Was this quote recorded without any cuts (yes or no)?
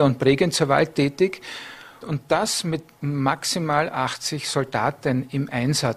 no